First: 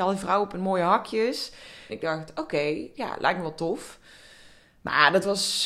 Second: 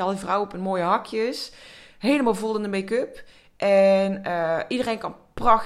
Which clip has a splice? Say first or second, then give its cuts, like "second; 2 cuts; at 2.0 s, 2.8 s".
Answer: first; 1 cut; at 1.9 s